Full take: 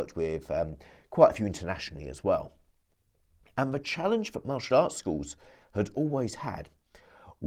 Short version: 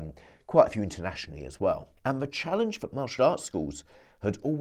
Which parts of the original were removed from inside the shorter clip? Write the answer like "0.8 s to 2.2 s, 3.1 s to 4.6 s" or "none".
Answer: 2.6 s to 3.5 s